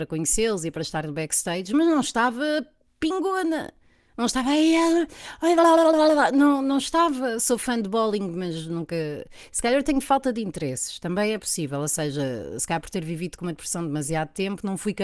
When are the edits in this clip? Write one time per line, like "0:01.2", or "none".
none